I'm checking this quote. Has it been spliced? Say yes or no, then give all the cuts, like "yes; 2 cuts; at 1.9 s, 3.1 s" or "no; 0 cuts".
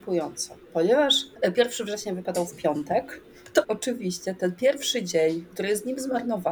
yes; 1 cut; at 3.6 s